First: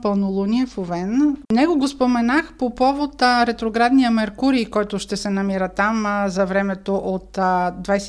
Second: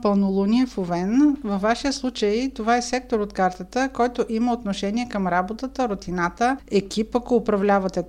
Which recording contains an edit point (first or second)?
first